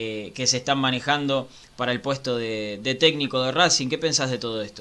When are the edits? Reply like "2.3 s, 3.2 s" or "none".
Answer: none